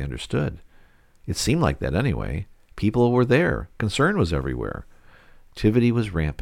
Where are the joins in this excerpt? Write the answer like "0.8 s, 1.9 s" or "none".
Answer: none